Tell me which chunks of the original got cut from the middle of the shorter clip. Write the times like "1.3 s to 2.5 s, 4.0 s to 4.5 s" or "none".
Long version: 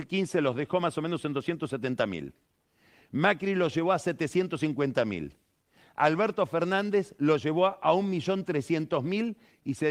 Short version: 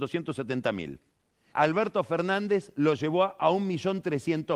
2.8 s to 5.9 s